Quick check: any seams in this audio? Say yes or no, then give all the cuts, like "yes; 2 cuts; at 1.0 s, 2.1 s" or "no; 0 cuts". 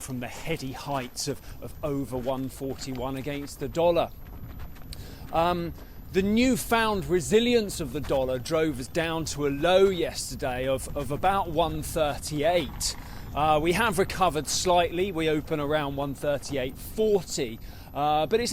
no; 0 cuts